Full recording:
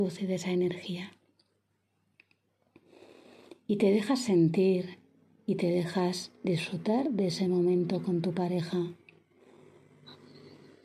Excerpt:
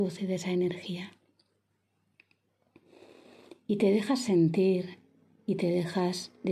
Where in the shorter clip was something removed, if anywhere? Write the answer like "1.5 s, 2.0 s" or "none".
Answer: none